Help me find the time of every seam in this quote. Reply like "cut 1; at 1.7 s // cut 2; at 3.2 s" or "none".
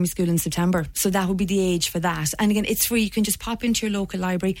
none